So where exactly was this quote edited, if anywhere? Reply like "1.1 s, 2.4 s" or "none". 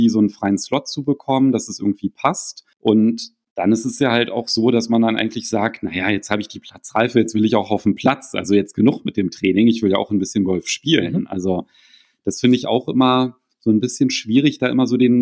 2.7 s